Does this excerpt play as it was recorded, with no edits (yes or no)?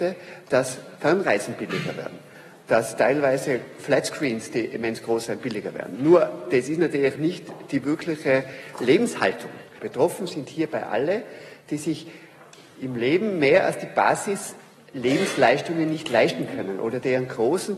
no